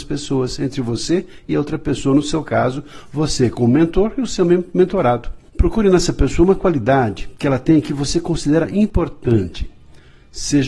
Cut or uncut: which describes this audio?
cut